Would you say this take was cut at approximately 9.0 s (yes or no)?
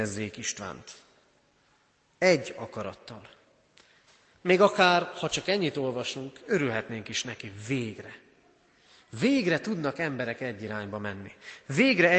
no